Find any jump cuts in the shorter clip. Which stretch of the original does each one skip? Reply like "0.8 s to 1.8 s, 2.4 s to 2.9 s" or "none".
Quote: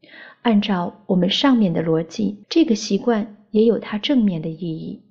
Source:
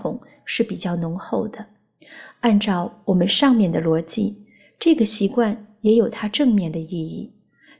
4.4 s to 4.7 s